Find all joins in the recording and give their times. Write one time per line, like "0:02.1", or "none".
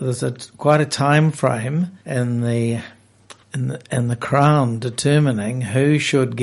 0:02.0
0:03.4